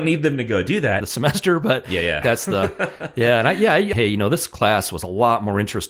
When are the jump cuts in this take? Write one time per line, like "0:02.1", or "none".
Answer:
0:01.0
0:02.2
0:03.9